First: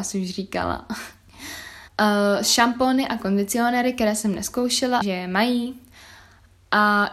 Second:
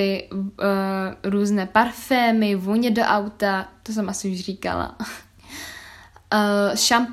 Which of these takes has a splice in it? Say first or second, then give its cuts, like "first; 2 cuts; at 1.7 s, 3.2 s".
first; 2 cuts; at 1.9 s, 5.0 s